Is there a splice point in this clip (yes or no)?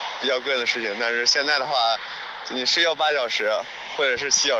no